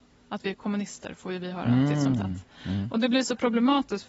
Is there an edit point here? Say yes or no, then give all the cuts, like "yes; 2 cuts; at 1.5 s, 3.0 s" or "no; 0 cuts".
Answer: no; 0 cuts